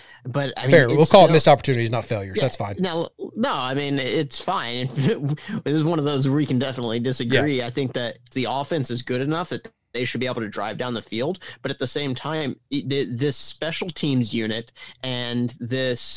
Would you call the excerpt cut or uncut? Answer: cut